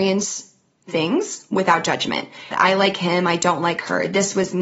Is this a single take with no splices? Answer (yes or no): no